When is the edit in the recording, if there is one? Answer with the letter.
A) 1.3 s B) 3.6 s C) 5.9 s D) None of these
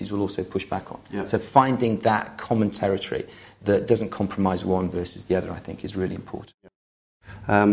D